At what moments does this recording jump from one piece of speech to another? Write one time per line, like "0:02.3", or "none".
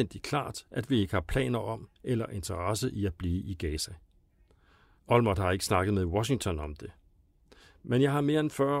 0:05.0